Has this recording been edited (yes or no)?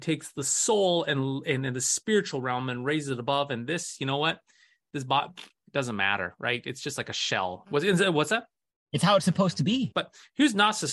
yes